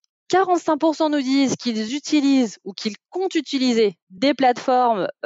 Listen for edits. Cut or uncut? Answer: uncut